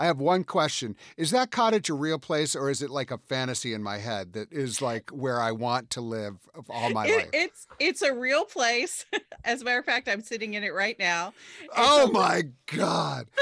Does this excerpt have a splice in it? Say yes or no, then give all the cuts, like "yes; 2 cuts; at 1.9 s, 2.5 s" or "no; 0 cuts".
no; 0 cuts